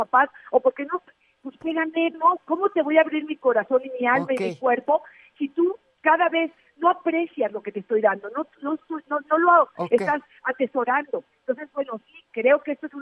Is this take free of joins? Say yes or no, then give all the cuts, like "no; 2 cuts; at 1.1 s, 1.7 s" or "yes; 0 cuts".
no; 1 cut; at 2.1 s